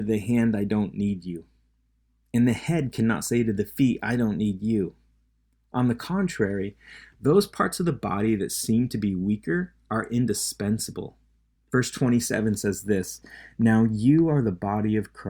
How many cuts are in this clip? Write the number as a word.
one